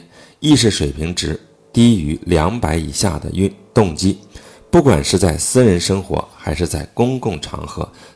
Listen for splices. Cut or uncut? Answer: uncut